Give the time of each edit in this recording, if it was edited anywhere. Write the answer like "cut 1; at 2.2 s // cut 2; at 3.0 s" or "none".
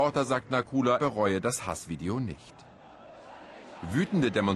cut 1; at 1.0 s